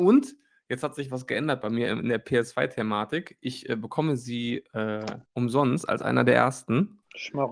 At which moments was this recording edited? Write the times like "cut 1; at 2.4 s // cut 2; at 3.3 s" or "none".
cut 1; at 5.3 s